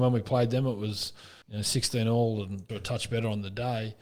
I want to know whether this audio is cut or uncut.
cut